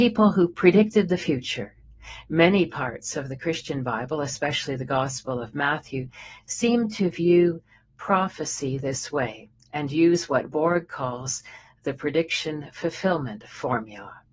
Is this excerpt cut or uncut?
uncut